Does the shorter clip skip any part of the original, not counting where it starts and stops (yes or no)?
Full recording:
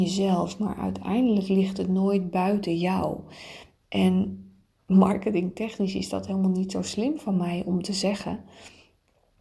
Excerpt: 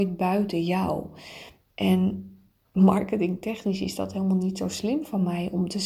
no